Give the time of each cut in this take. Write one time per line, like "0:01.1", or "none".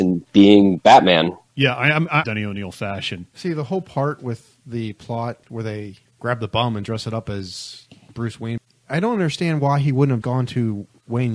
0:02.2
0:10.2